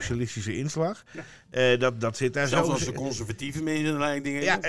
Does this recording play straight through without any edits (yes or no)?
yes